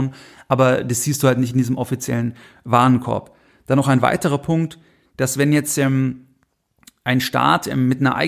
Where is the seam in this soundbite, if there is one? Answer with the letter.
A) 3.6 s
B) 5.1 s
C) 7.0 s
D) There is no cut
D